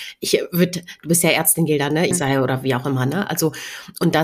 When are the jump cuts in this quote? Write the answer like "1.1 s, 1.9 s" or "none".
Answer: 2.1 s